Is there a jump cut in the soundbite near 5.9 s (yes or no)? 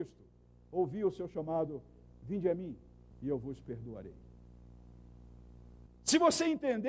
yes